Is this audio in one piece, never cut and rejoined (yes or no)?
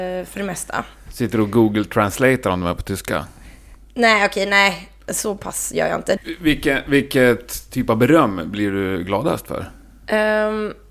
no